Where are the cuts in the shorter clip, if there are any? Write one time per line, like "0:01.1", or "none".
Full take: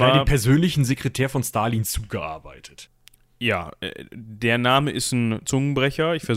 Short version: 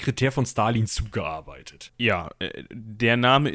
0:01.9